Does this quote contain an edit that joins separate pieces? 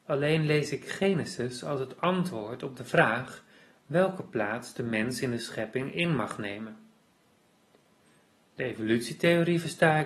no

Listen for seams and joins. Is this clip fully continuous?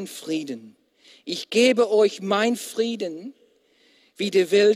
yes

